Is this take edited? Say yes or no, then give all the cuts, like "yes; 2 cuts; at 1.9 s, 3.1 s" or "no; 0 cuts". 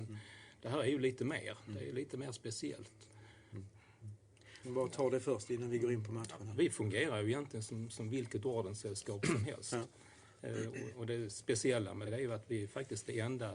yes; 3 cuts; at 3.5 s, 4.6 s, 12.1 s